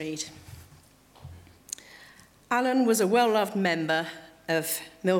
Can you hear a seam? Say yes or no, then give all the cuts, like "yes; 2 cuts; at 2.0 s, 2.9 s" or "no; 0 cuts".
no; 0 cuts